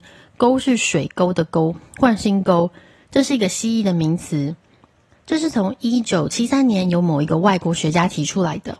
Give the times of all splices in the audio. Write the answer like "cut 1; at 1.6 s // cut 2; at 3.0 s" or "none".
none